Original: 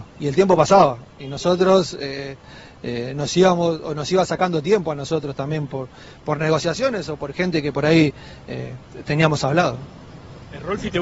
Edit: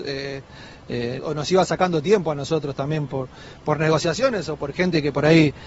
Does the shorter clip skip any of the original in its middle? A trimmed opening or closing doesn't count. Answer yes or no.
yes